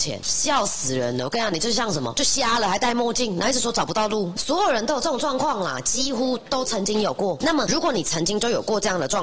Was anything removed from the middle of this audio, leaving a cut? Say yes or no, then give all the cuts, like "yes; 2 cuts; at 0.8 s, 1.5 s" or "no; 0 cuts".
no; 0 cuts